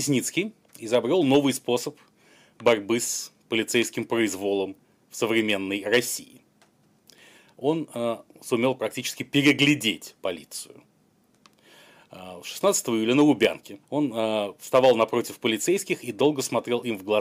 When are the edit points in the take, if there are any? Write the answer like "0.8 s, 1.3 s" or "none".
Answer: 13.8 s